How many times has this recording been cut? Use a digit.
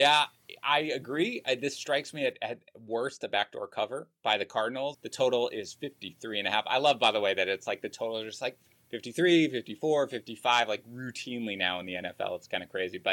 1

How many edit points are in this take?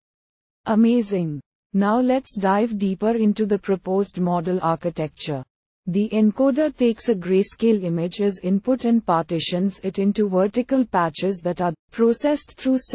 1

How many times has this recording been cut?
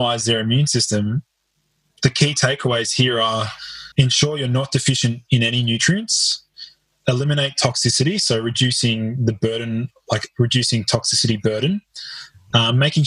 1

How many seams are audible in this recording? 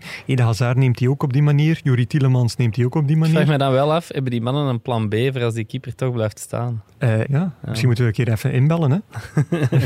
1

